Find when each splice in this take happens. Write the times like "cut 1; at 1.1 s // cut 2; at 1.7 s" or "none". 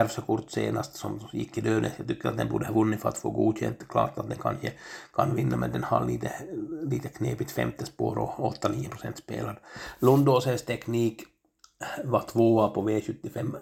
none